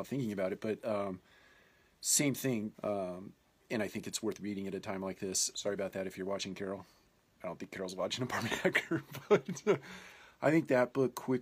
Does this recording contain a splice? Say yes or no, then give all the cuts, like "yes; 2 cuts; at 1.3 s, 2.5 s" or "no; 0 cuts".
yes; 2 cuts; at 2.7 s, 5.5 s